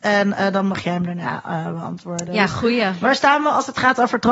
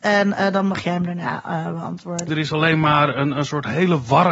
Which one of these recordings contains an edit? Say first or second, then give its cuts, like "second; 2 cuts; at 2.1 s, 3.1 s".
second; 1 cut; at 2.3 s